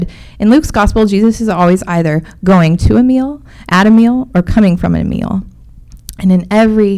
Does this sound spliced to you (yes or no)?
no